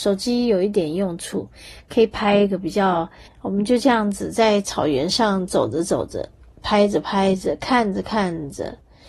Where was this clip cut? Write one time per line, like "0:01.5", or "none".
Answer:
0:03.3